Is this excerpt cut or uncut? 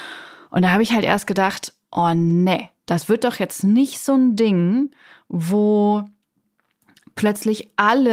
uncut